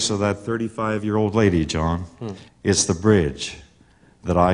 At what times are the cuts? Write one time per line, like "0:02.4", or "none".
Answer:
0:02.5